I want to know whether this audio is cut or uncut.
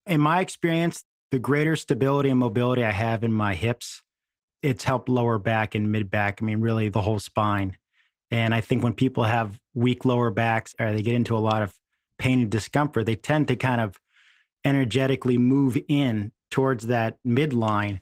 uncut